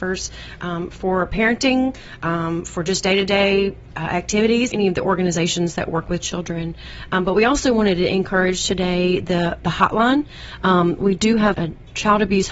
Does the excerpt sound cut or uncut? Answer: cut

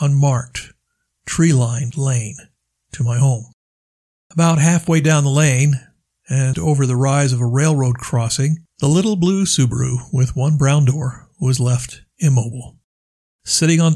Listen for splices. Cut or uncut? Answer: cut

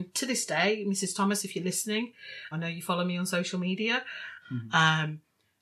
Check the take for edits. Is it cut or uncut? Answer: cut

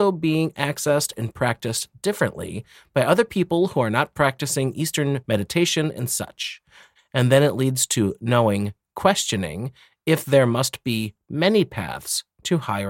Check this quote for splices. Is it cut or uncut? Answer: cut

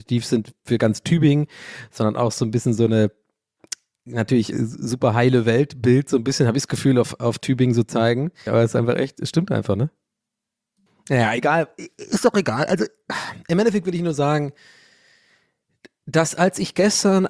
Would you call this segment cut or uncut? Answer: cut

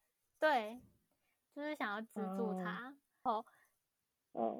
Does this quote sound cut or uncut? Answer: cut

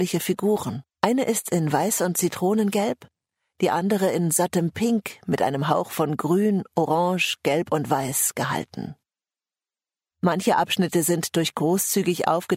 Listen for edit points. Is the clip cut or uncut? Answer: cut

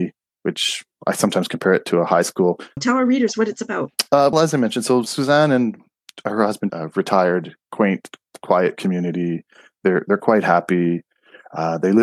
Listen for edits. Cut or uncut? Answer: cut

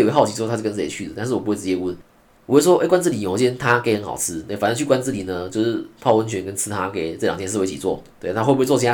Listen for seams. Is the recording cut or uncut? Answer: uncut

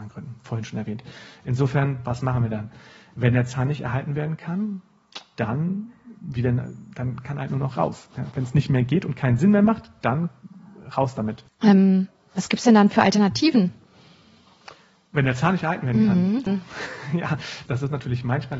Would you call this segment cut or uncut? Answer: cut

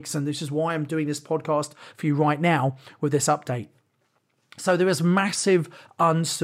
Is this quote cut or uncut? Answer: uncut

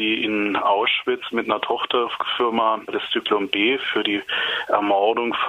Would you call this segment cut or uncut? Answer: uncut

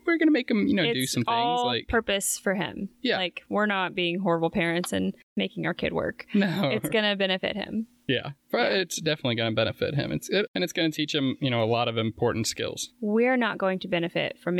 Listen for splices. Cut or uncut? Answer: cut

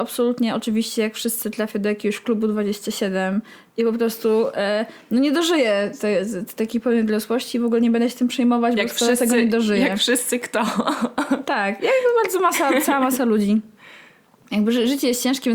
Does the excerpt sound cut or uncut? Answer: uncut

